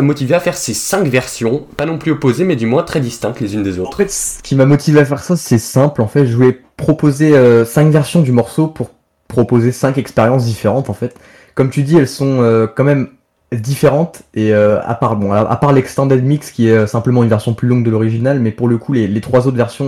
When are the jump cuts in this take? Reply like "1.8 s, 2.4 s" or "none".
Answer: none